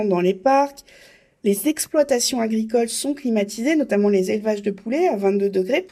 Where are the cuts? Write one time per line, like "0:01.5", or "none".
none